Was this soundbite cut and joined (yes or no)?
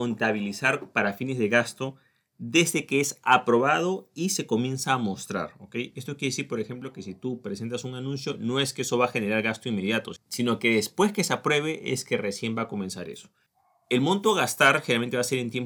no